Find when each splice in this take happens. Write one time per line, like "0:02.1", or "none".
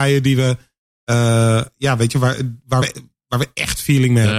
none